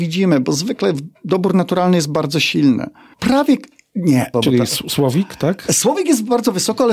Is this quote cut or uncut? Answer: cut